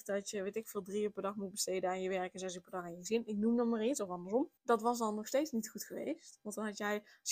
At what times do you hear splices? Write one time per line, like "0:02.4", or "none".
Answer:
0:04.6